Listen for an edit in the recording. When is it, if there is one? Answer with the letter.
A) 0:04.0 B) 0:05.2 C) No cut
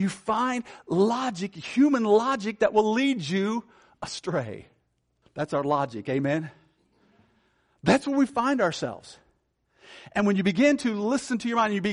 B